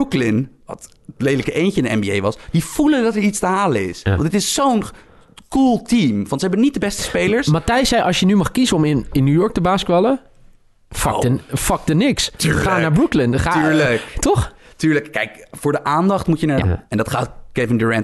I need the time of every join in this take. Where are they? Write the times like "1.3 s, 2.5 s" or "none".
16.6 s